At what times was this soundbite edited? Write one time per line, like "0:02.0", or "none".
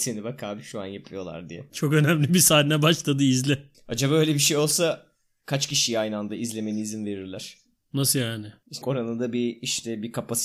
0:08.8